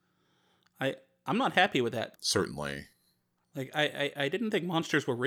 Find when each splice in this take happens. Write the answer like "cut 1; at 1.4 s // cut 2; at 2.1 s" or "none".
cut 1; at 2.2 s